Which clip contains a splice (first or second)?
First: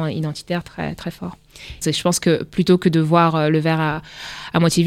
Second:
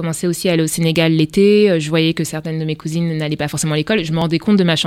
first